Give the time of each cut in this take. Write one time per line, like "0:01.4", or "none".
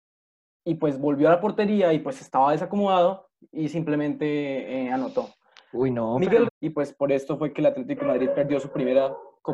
0:06.5